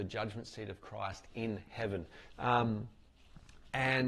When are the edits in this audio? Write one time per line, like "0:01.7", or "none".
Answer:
0:02.3